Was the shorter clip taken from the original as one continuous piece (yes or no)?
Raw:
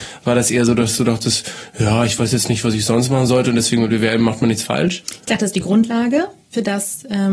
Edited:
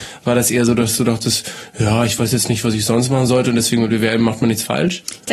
yes